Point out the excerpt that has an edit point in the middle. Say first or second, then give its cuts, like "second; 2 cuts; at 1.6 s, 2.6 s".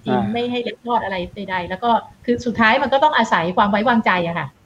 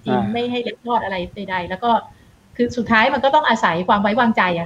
first; 1 cut; at 2.1 s